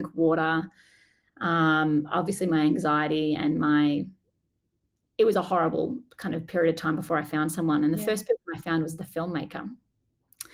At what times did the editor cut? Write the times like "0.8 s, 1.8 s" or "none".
none